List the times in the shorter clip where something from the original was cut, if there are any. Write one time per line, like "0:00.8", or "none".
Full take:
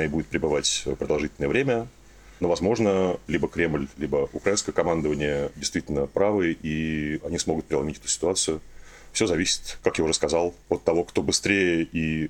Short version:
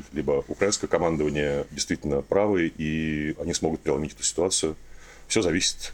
none

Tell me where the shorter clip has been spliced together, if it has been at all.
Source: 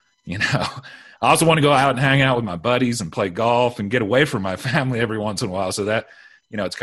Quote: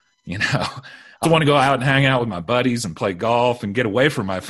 0:01.2

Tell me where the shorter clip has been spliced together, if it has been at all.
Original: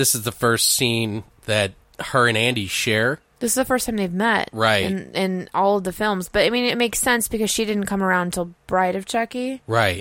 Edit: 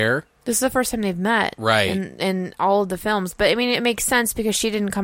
none

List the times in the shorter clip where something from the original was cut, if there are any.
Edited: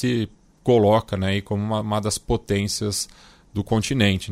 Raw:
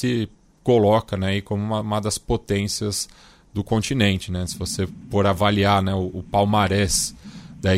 none

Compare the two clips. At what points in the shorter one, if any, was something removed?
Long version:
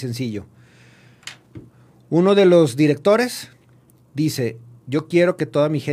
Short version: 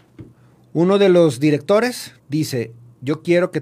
0:02.2

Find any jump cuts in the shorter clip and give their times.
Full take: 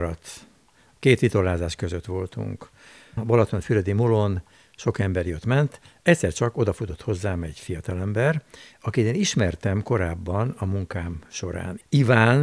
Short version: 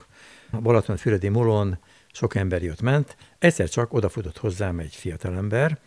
none

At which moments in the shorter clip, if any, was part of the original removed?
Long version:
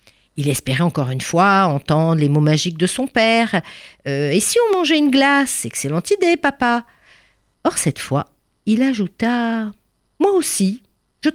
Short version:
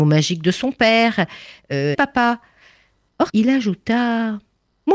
0:01.9
0:03.3

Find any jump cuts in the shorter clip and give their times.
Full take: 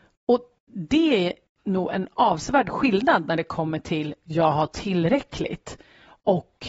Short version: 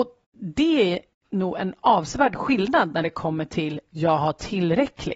none

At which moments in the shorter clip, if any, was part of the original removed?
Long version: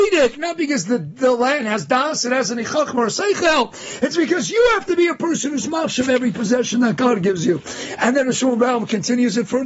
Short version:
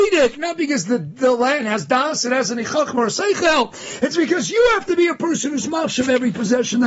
none

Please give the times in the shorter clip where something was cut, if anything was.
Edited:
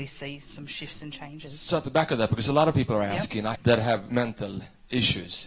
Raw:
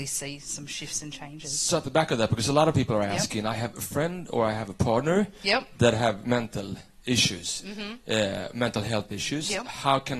0:03.6

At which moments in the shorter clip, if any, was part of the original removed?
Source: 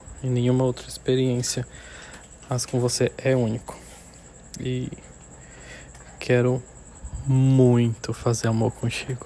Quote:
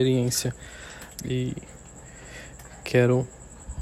0:01.1

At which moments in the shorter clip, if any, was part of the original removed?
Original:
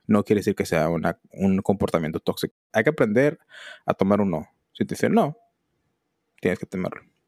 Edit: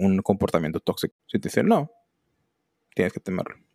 0:01.2

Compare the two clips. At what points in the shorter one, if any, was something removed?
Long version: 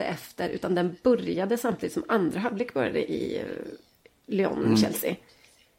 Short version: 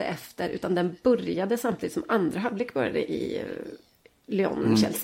none

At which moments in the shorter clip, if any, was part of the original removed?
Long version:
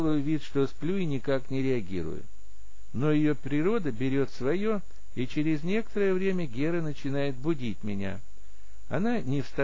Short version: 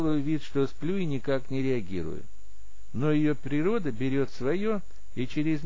none

